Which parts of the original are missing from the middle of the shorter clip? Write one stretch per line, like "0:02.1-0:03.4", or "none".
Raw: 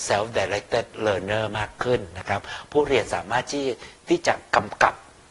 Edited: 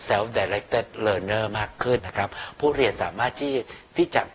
0:02.0-0:02.1